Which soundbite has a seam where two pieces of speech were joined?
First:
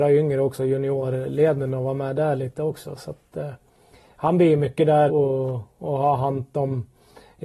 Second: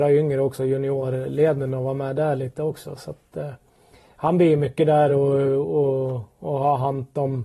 first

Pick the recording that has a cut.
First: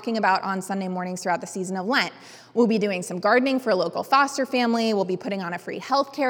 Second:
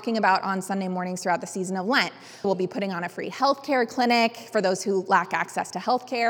second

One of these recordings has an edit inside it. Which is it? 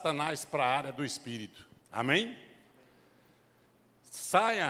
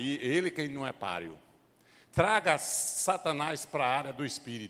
first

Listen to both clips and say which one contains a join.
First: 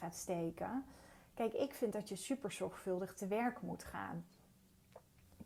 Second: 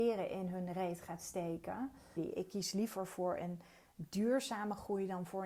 second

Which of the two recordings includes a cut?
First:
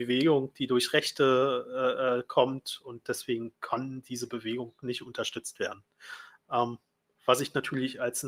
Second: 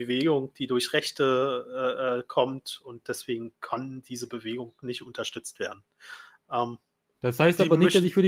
second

